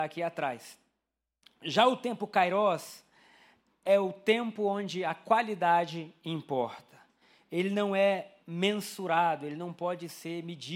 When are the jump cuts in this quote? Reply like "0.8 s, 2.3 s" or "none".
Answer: none